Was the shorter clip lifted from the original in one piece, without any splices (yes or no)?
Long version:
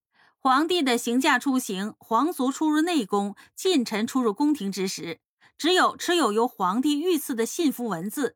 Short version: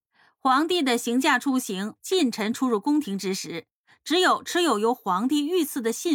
no